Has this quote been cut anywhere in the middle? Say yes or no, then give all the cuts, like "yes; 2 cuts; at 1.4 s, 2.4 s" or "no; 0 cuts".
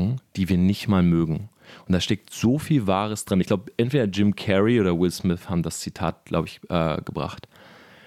no; 0 cuts